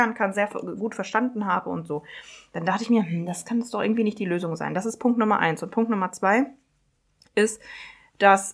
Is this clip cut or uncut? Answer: uncut